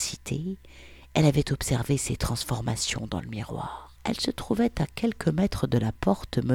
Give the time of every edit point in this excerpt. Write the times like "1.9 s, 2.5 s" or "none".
4.0 s